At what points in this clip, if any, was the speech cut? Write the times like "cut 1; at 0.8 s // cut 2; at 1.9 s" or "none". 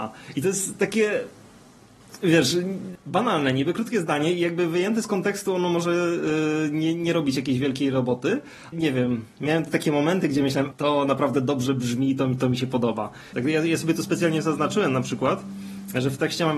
cut 1; at 8.7 s // cut 2; at 10.7 s // cut 3; at 13.3 s